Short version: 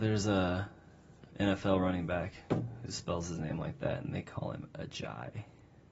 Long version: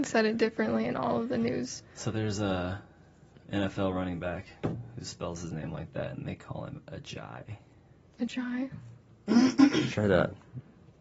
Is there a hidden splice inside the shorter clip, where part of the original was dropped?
no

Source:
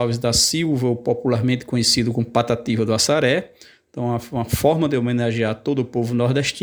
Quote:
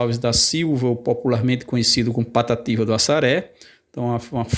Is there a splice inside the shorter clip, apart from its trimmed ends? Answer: no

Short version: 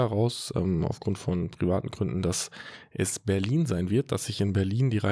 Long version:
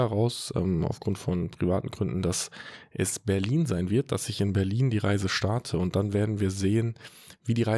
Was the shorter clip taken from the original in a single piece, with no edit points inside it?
yes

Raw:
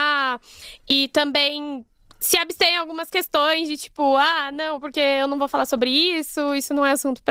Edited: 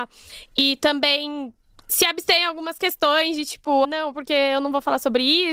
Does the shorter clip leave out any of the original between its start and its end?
yes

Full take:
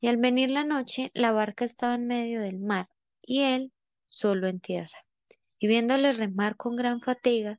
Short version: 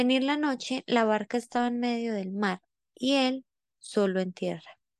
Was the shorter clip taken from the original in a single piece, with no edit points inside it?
yes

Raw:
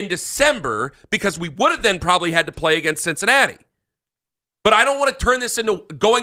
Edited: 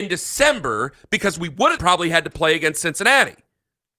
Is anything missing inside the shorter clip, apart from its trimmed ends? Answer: yes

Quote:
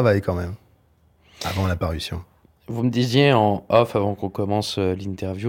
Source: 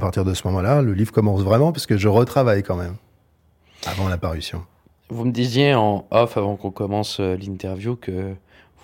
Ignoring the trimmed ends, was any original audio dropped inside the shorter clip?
no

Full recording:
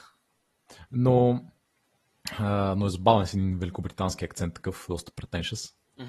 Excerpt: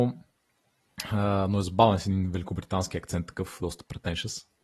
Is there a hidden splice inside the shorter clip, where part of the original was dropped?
no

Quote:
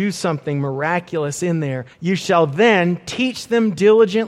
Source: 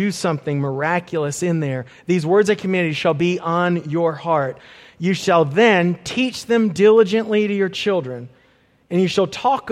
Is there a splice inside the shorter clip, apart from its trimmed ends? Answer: yes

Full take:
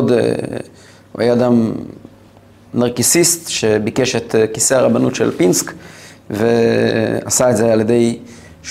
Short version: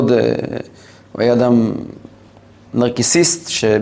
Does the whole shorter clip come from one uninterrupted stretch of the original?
yes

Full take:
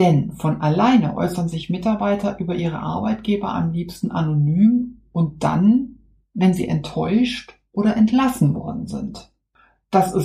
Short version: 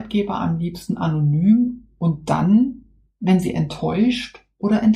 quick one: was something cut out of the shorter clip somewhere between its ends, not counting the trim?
no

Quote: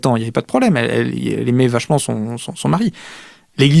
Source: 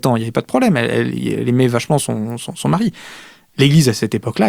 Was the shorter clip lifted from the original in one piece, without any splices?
yes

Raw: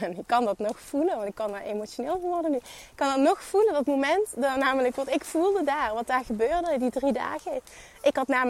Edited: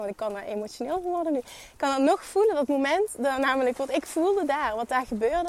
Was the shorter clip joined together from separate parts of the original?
no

